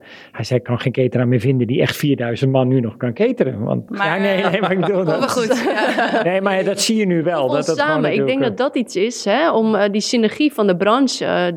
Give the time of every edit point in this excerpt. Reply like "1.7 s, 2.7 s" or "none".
3.9 s

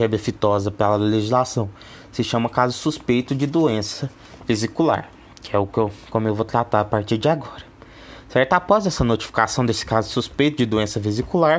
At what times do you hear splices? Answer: none

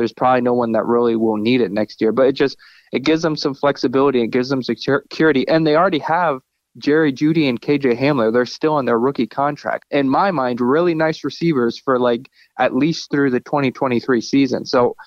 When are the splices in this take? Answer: 9.8 s

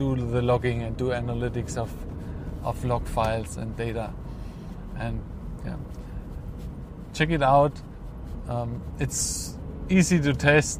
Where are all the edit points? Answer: none

